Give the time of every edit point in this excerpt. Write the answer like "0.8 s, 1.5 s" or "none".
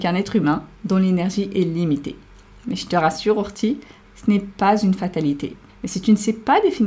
4.0 s, 5.7 s